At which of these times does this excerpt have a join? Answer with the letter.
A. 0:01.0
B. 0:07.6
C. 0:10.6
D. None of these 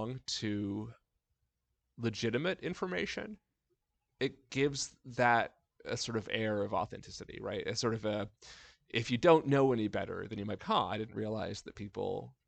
C